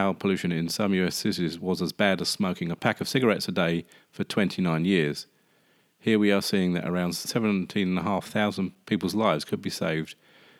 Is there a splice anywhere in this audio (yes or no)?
no